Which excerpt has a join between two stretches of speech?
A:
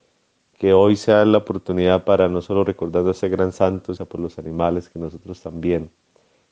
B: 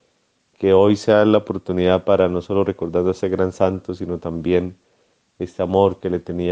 A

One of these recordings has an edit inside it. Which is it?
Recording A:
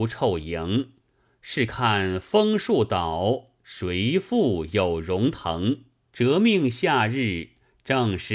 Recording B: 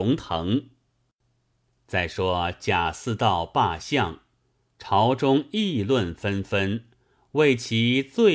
A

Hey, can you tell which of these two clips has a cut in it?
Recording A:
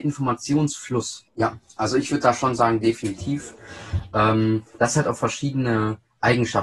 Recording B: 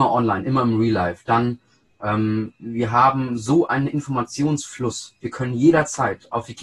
A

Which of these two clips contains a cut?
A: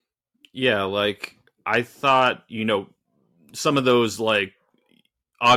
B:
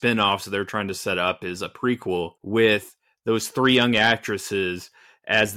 B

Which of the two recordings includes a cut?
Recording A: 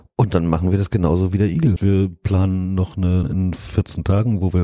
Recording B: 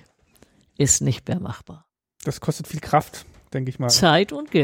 A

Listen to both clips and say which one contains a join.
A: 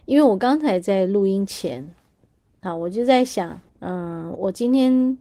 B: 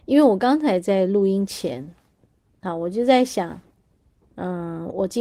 A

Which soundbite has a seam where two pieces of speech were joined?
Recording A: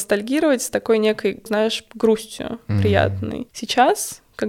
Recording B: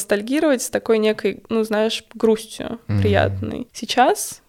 A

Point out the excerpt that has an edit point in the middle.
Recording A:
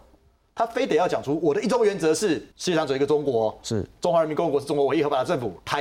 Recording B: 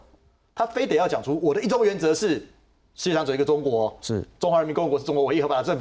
A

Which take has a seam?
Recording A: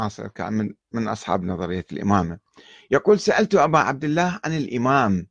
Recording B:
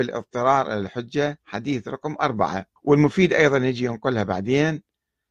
B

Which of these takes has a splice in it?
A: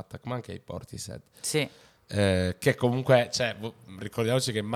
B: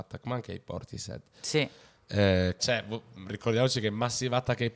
B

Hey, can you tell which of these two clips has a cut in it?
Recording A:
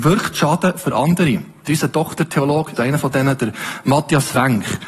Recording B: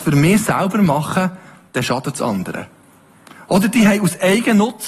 A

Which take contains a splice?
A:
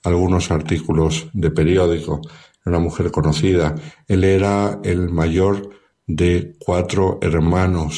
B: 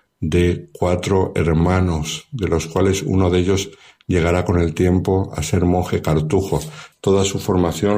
B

